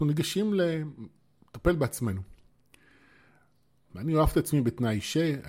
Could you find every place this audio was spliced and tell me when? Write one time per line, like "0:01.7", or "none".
0:03.9

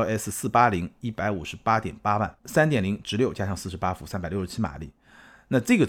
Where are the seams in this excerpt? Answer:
0:02.4

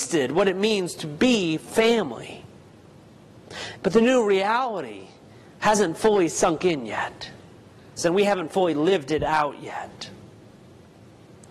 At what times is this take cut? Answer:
0:03.8
0:08.0

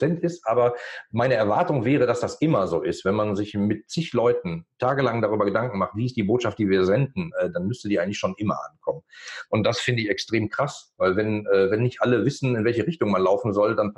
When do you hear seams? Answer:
0:09.5

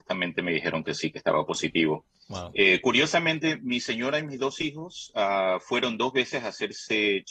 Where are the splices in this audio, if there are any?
none

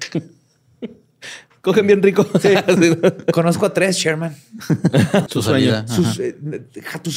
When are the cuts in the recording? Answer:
0:05.3

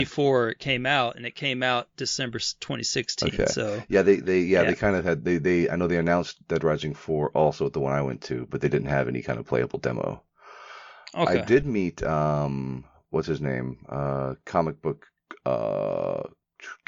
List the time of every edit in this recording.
none

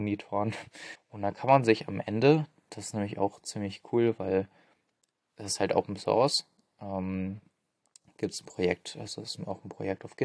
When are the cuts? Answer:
0:00.9

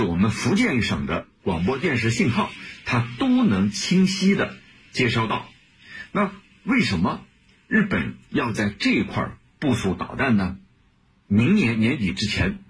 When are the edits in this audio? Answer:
0:11.3

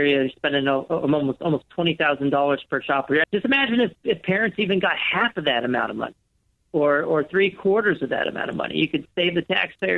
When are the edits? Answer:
0:03.2

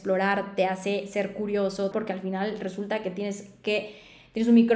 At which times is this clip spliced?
0:01.9

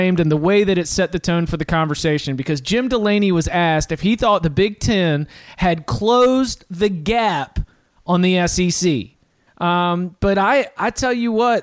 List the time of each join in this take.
0:09.5

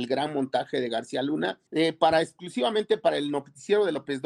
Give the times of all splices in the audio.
0:01.7

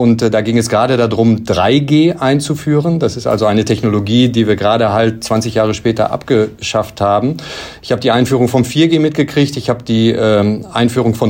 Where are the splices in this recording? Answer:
none

